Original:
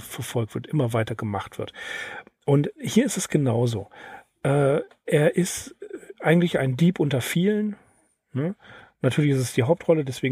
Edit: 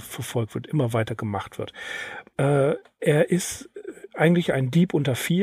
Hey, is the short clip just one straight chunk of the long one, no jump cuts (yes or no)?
no